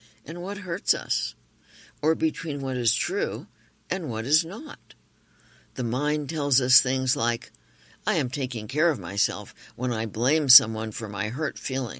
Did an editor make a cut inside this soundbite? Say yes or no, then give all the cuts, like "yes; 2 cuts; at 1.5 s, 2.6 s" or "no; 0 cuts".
no; 0 cuts